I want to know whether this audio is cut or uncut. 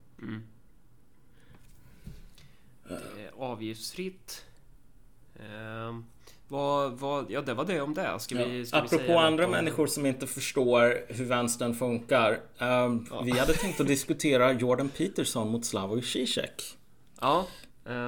uncut